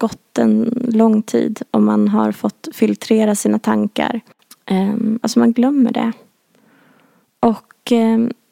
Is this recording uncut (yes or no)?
no